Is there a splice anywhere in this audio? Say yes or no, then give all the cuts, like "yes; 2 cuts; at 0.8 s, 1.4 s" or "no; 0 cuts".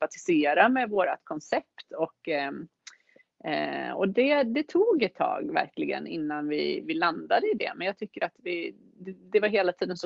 no; 0 cuts